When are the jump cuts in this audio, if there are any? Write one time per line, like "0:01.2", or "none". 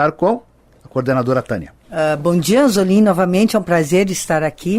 0:01.8